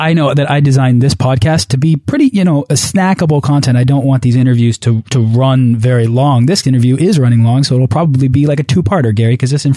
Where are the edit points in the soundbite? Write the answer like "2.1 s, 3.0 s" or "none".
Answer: none